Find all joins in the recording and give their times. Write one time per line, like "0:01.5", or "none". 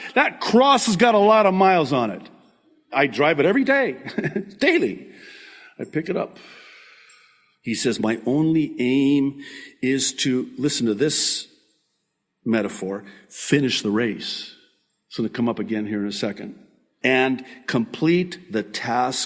none

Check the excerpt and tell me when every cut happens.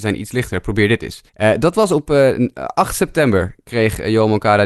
0:01.3

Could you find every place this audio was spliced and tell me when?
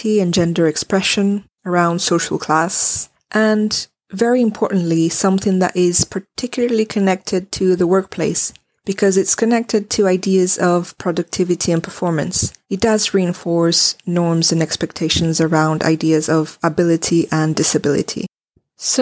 0:12.6

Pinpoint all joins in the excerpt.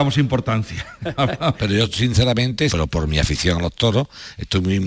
0:01.6
0:02.7

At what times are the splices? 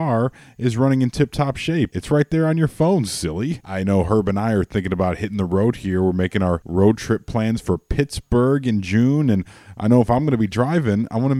0:01.9
0:03.6

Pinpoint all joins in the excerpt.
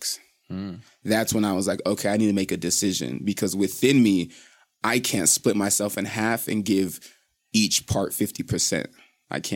none

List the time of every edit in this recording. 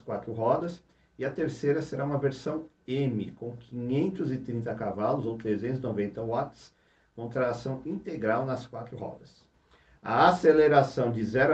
none

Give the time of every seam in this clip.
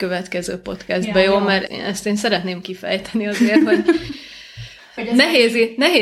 0:01.7
0:04.8

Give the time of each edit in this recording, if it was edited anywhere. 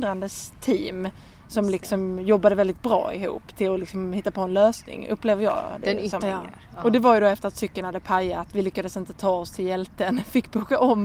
0:06.2

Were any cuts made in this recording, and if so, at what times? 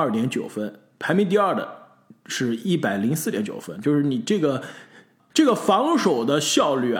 none

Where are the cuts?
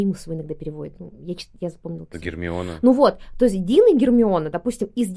none

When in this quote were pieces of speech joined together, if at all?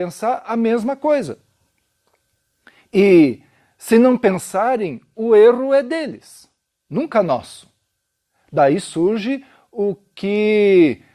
none

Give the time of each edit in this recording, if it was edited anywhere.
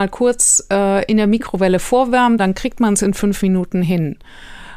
0:02.4

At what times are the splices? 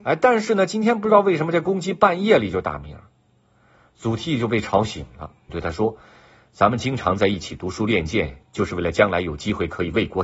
0:05.5

